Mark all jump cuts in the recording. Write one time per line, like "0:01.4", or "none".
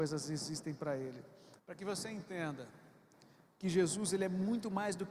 0:01.6